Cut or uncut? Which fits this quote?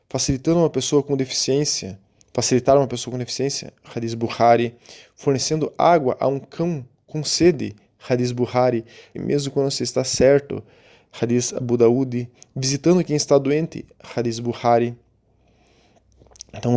cut